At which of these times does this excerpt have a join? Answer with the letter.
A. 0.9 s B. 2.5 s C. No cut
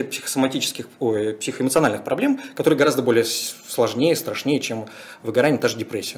C